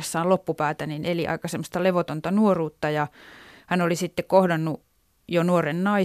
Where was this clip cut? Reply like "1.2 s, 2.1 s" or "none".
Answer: none